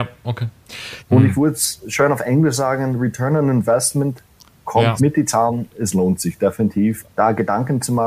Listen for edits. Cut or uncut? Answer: cut